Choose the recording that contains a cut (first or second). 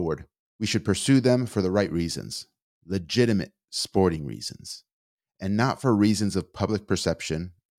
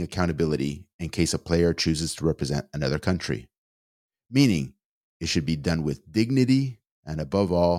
second